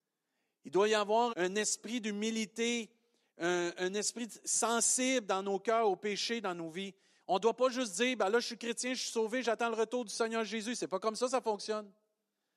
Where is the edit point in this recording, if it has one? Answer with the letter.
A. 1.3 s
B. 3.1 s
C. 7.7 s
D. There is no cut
A